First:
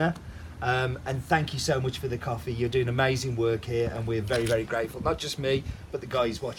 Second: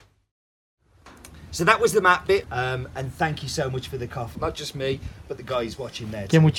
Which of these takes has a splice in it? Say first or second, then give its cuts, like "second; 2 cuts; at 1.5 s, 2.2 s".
second; 2 cuts; at 2.4 s, 4.3 s